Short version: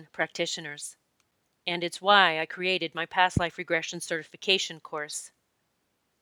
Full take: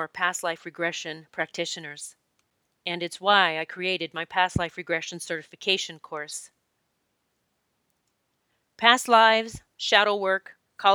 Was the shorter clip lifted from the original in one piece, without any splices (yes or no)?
yes